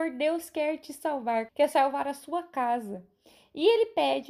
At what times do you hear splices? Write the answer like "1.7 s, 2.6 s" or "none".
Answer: 1.5 s